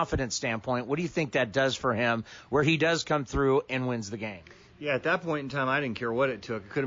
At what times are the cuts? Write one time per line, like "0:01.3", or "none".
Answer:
none